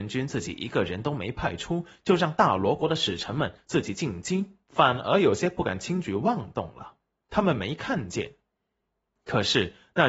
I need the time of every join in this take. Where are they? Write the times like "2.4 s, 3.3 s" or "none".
4.6 s, 7.2 s